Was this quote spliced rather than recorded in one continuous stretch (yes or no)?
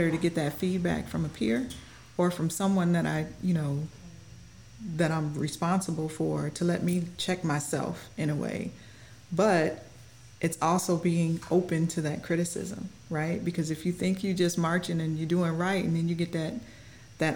no